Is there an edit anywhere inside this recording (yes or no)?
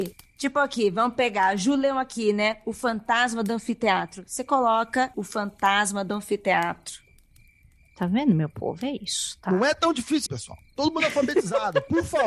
yes